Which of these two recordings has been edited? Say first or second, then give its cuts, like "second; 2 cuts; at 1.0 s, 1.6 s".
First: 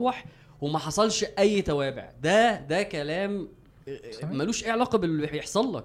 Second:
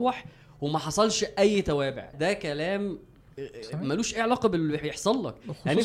second; 1 cut; at 2.1 s